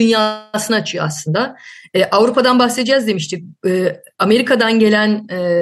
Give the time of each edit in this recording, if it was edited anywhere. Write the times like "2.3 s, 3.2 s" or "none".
none